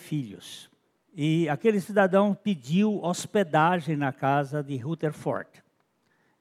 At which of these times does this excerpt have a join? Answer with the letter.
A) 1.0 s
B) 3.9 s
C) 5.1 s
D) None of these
A